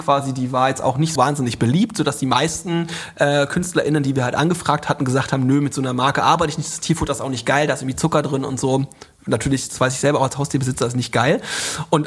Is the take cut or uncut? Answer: cut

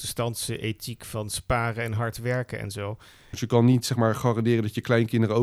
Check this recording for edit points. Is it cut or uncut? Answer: cut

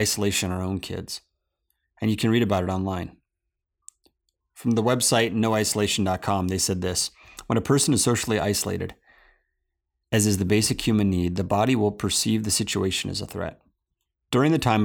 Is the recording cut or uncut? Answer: uncut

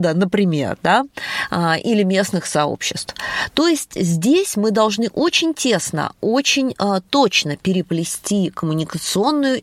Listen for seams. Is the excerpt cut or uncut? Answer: uncut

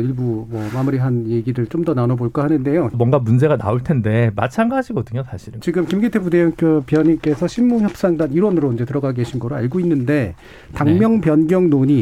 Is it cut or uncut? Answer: cut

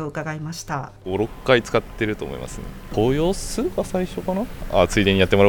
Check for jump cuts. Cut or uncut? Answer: cut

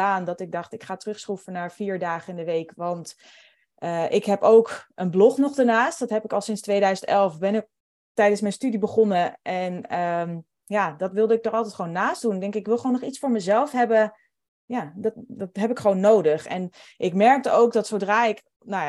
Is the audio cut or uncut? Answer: cut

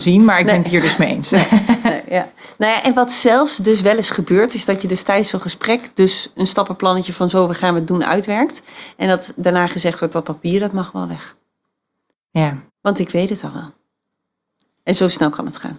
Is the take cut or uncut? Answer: uncut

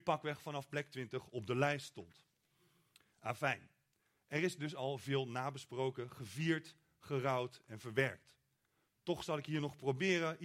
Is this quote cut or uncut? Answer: uncut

